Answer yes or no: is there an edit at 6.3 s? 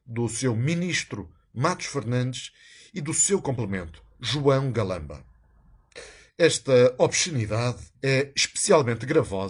yes